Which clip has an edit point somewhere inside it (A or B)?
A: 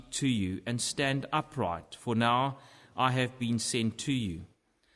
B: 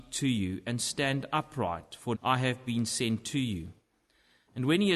B